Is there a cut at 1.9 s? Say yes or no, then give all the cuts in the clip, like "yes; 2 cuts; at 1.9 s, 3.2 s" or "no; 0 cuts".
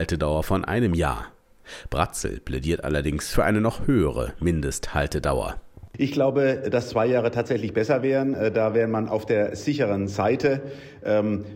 no; 0 cuts